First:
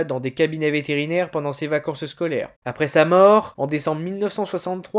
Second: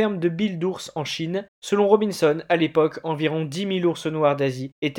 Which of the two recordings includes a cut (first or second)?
first